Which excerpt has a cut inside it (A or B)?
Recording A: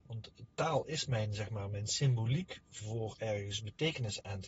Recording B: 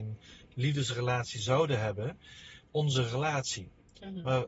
B